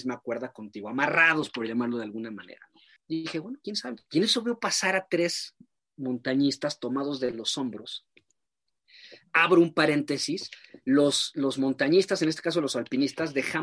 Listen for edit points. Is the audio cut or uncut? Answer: cut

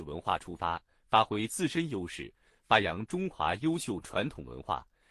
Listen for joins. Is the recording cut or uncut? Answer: uncut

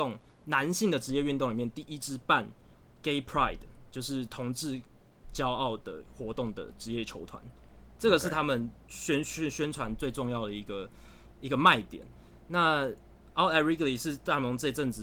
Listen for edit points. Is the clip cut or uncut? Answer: uncut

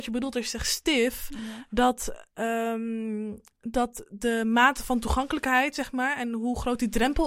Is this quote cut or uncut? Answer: uncut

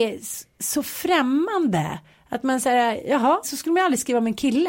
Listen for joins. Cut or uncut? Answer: cut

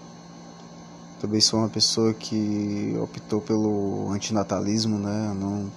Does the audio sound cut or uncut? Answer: cut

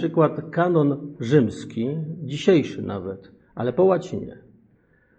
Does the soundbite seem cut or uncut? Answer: uncut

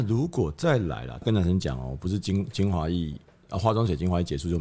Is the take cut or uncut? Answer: cut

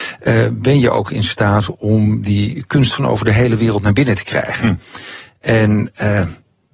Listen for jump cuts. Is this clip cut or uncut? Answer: uncut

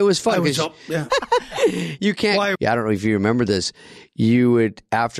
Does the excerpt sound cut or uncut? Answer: cut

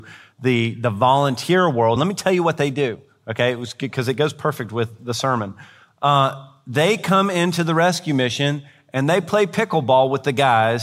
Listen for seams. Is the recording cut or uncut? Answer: uncut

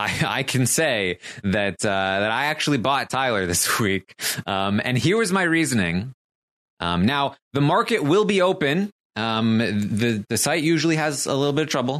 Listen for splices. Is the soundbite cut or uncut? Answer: cut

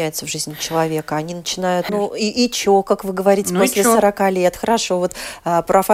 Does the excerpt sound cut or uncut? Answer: cut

